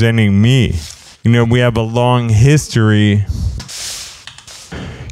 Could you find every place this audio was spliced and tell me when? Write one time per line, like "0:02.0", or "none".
none